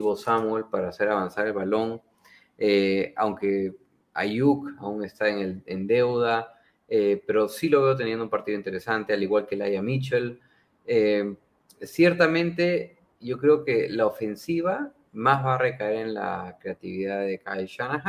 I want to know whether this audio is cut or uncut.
uncut